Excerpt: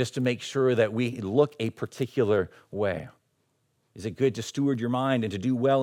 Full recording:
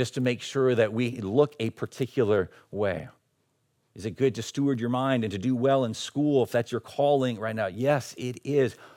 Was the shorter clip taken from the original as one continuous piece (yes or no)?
yes